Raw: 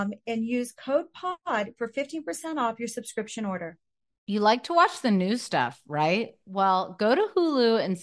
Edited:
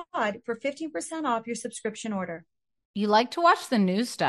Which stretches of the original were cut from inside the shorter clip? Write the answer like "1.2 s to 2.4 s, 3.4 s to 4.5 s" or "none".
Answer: none